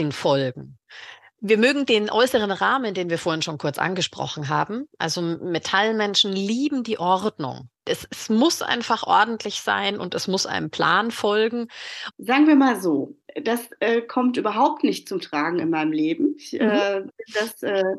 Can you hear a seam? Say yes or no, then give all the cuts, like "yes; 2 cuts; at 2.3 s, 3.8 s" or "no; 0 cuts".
yes; 2 cuts; at 7.7 s, 12.1 s